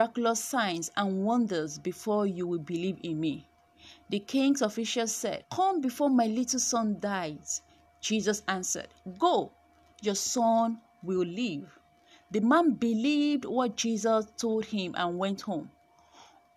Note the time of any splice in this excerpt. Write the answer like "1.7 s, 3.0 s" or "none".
5.4 s